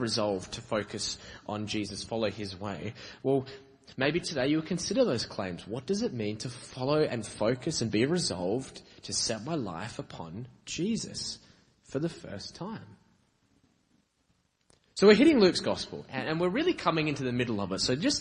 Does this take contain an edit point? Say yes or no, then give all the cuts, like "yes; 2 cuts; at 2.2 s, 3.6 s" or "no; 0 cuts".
no; 0 cuts